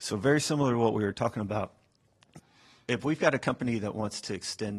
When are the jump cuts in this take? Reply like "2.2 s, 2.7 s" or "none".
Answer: none

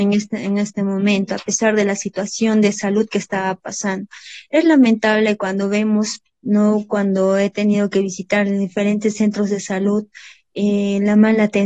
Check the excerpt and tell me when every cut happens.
6.3 s

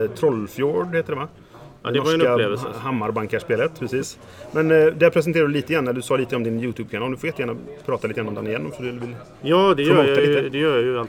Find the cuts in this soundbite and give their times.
none

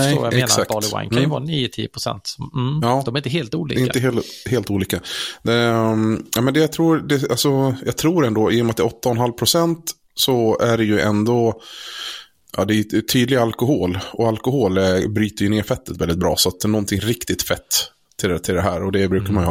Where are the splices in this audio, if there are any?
none

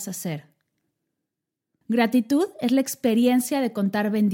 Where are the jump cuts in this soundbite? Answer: 1.8 s

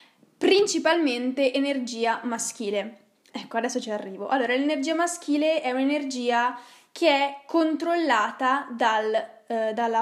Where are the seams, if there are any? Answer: 3.3 s

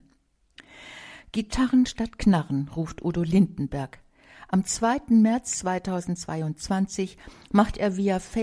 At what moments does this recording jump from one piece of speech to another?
none

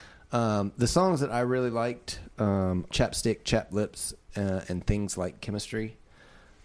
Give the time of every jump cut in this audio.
2.9 s

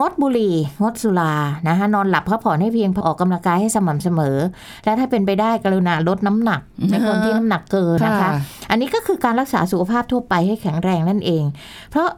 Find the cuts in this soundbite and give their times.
3.0 s, 8.0 s

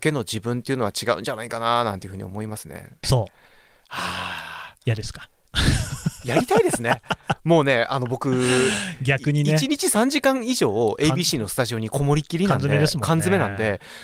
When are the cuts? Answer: 3.0 s

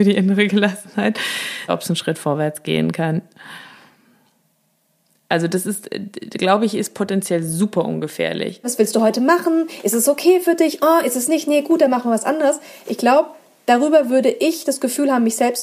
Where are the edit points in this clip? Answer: 1.7 s, 8.6 s

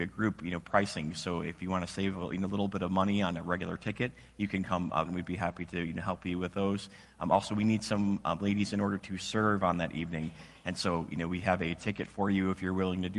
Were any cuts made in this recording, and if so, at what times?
5.1 s

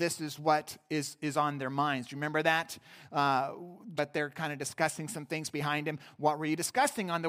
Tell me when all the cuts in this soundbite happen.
4.0 s

